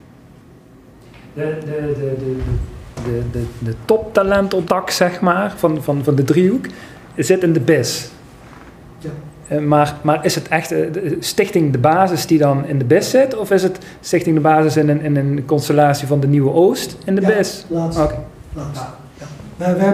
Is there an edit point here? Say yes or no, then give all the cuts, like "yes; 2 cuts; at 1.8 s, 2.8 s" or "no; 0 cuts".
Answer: yes; 1 cut; at 4.7 s